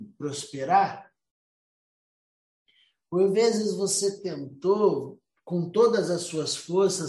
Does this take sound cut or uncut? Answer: uncut